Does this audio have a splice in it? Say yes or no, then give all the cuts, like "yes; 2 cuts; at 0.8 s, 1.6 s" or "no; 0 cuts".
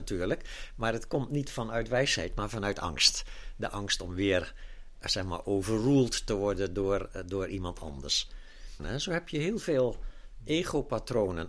yes; 1 cut; at 8.8 s